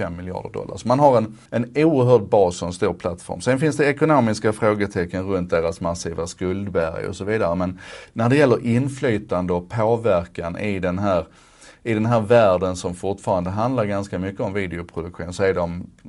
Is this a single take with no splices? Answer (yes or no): no